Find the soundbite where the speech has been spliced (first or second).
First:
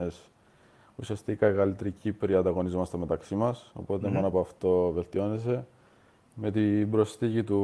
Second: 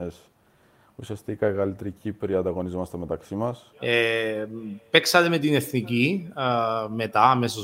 second